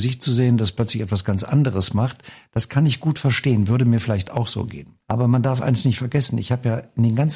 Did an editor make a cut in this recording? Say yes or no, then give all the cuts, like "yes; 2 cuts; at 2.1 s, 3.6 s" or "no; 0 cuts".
yes; 1 cut; at 5.0 s